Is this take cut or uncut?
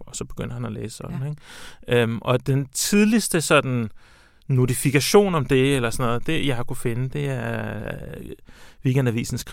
uncut